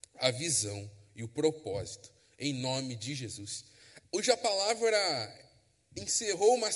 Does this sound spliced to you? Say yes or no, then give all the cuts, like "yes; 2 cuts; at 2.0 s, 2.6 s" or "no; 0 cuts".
yes; 1 cut; at 4.0 s